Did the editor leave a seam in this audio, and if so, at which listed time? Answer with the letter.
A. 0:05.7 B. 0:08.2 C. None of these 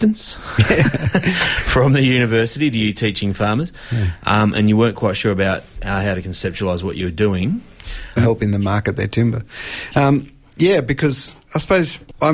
B